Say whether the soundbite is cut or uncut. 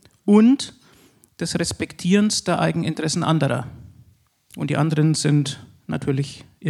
uncut